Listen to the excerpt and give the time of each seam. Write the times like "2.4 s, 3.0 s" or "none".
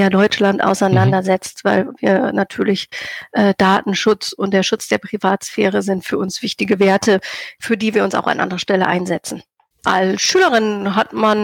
9.7 s

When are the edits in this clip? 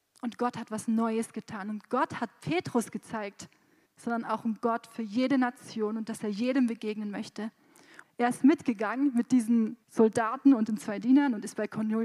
3.8 s, 8.0 s, 9.8 s

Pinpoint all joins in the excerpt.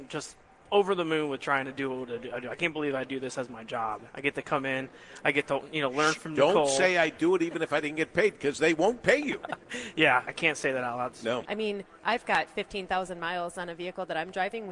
10.2 s, 11.4 s

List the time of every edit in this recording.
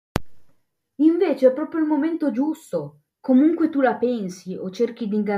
3.1 s

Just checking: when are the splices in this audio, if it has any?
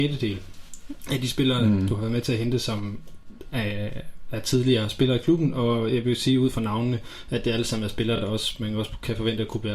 none

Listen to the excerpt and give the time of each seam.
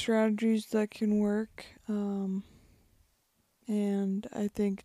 none

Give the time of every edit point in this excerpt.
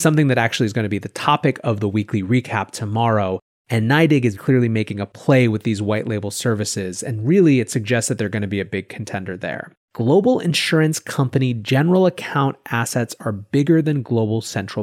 4.3 s, 9.8 s

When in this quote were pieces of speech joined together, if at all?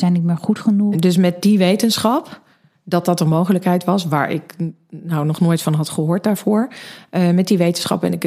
0.9 s

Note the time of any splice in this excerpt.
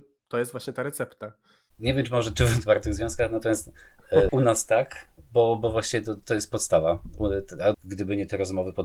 4.3 s, 7.7 s

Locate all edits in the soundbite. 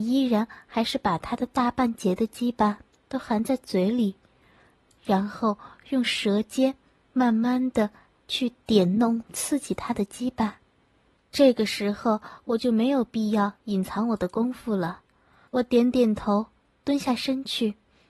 11.2 s, 15.5 s

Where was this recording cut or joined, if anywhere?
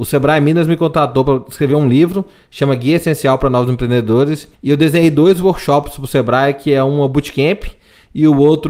4.5 s

